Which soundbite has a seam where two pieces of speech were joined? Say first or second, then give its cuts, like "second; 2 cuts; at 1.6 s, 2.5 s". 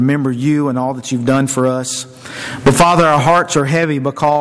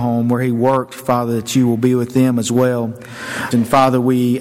second; 1 cut; at 3.5 s